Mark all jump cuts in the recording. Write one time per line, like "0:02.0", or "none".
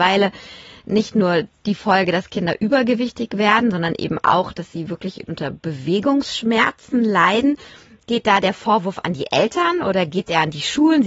none